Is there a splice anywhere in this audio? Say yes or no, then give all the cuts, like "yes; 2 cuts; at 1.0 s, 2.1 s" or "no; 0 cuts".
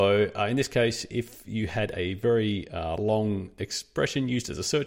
no; 0 cuts